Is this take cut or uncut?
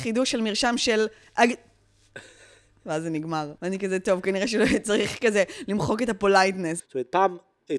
cut